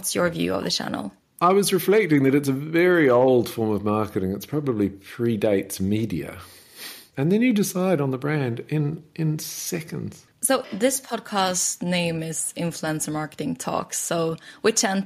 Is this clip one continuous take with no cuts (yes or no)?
no